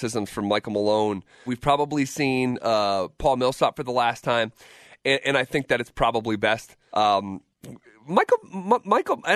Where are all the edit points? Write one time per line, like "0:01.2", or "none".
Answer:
0:01.5
0:06.9